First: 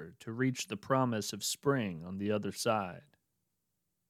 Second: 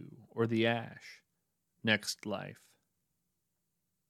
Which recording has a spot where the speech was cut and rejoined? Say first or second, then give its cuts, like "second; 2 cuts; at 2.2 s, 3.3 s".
second; 1 cut; at 1.7 s